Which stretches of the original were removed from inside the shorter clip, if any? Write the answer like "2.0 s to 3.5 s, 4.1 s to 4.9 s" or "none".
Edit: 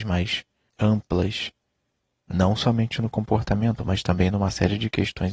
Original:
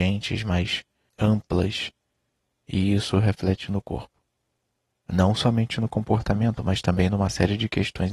2.6 s to 5.0 s

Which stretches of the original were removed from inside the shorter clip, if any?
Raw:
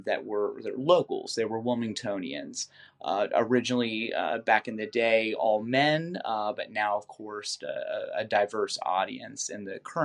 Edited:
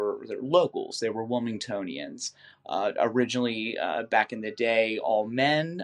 none

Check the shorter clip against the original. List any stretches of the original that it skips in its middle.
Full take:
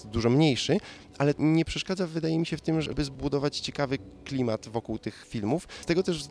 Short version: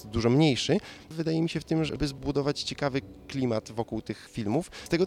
1.1 s to 2.1 s

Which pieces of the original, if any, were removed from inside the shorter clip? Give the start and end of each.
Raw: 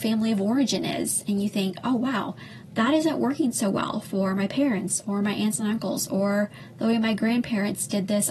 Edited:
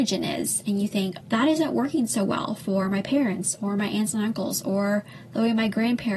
1.8 s to 2.7 s

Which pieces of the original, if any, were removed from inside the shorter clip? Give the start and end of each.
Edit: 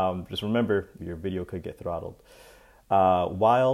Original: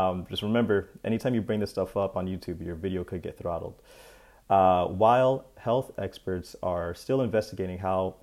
1.0 s to 2.6 s

